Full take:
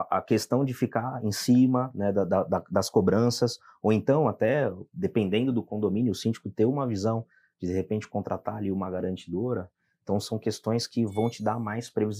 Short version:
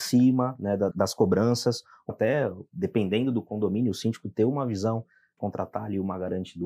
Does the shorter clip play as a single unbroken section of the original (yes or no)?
no